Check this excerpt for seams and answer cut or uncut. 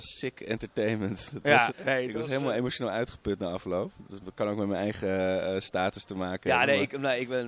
cut